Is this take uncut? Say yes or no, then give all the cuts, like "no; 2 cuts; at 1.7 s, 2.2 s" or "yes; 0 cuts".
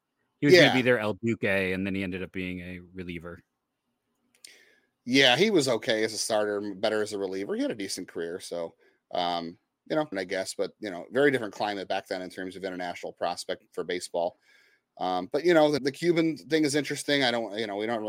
no; 2 cuts; at 10.1 s, 15.8 s